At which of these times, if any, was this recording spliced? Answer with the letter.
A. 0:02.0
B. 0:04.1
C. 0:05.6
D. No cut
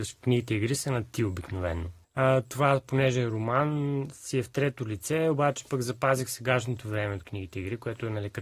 A